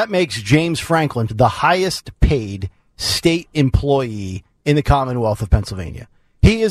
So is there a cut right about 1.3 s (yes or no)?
yes